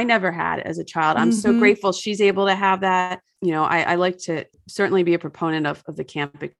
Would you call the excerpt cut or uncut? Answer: uncut